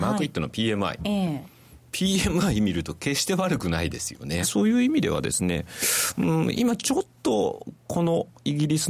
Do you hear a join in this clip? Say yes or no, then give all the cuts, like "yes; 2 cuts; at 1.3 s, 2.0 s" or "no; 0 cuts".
yes; 1 cut; at 4.4 s